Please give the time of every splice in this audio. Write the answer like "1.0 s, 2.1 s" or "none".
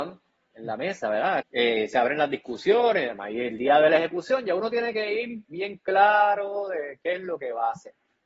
1.4 s